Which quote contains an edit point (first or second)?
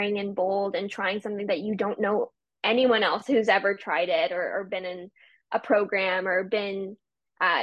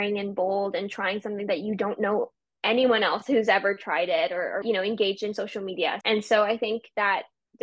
second